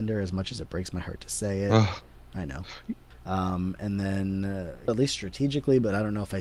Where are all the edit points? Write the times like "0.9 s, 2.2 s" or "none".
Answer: 3.1 s, 4.9 s